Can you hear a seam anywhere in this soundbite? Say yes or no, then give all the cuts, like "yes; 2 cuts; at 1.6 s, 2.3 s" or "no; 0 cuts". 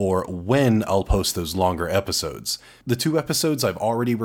yes; 1 cut; at 2.8 s